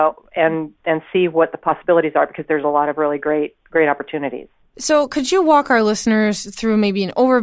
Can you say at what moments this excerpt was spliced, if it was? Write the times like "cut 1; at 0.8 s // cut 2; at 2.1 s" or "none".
none